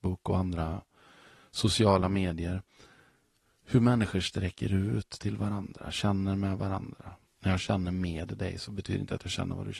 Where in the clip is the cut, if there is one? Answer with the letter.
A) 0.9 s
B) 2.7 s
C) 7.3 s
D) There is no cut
C